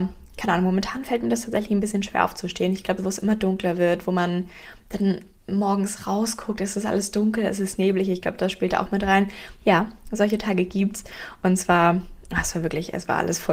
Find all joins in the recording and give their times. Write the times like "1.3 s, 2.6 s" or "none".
3.0 s, 9.6 s